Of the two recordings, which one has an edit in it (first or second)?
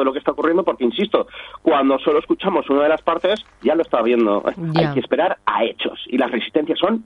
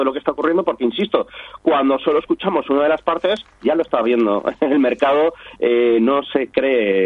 first